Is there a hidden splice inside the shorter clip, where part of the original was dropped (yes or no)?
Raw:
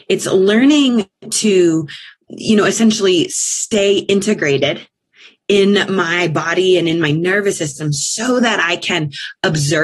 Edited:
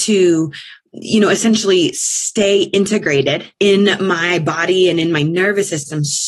yes